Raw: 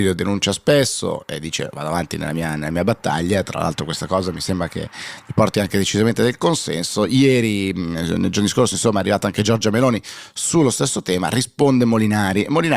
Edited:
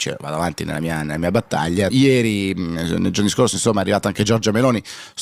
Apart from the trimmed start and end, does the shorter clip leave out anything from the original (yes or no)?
yes